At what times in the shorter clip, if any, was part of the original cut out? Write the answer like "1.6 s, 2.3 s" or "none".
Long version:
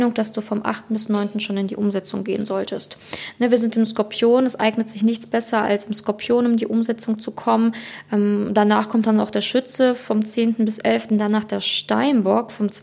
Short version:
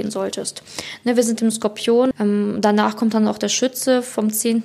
2.1 s